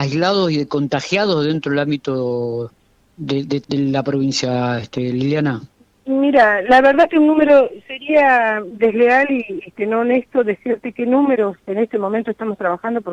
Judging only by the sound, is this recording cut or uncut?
cut